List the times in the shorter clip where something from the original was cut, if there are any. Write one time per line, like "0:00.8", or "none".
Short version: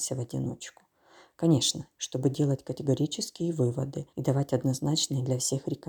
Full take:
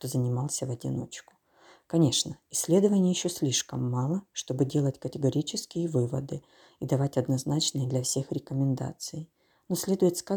0:01.9
0:04.1